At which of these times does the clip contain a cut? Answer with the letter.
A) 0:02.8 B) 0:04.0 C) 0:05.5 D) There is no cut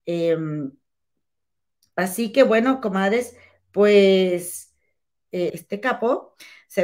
C